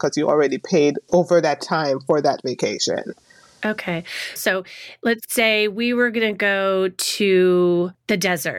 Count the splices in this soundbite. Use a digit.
1